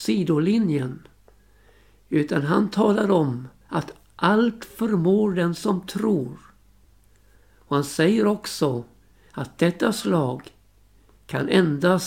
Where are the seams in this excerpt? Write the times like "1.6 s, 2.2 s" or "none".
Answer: none